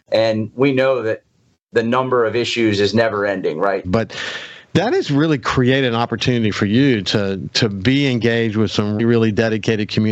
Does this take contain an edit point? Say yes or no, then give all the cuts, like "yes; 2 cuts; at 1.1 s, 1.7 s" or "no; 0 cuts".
yes; 2 cuts; at 3.8 s, 9.0 s